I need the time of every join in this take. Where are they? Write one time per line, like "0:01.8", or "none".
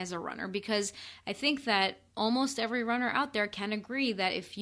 0:02.1